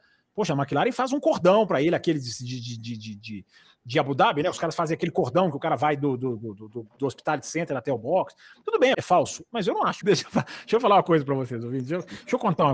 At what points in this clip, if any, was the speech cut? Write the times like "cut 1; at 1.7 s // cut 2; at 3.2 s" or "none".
cut 1; at 8.9 s // cut 2; at 10.0 s